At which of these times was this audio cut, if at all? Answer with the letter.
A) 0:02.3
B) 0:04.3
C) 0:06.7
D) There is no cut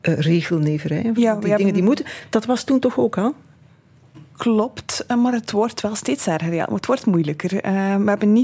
D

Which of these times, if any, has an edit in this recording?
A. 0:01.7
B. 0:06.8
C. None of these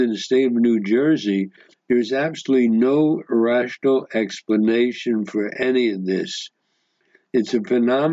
A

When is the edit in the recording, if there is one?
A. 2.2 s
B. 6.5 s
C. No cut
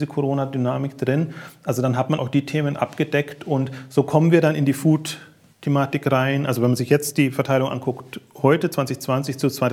A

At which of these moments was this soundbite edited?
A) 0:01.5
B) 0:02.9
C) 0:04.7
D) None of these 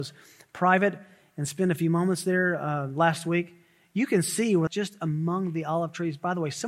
C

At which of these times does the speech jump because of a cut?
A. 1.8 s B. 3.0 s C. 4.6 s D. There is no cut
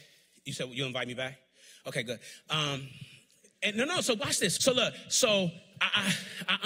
C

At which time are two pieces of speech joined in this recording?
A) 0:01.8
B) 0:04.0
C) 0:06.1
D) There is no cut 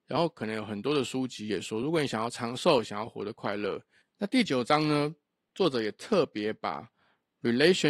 B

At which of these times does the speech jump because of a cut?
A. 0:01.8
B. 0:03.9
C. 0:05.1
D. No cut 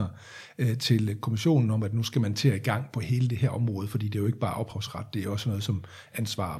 D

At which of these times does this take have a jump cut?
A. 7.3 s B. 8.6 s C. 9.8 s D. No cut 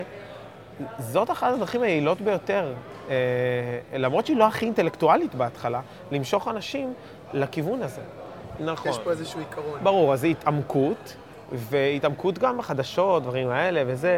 B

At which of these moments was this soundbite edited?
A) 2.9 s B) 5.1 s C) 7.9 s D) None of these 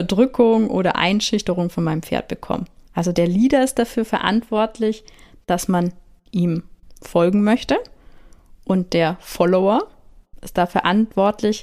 A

